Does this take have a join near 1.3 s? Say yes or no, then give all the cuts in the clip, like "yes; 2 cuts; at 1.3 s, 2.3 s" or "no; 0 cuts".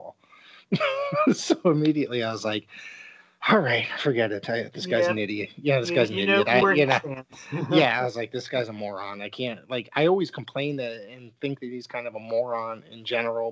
no; 1 cut; at 6.6 s